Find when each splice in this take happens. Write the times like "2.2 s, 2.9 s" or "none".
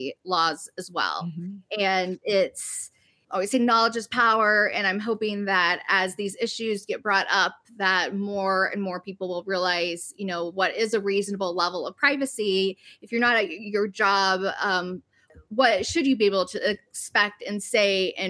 none